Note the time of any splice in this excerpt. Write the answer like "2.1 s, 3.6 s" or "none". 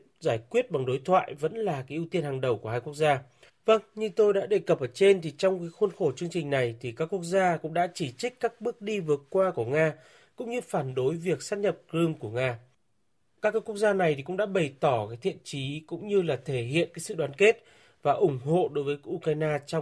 3.5 s